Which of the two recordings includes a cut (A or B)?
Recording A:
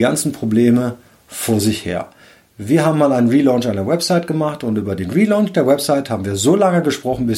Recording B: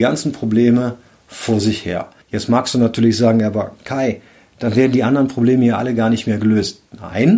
B